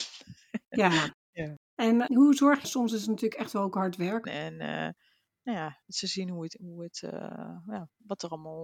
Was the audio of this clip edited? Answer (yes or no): yes